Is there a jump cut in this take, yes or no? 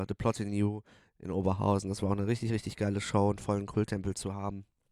no